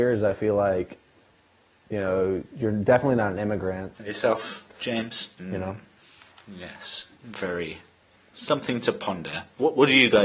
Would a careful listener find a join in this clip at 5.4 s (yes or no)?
yes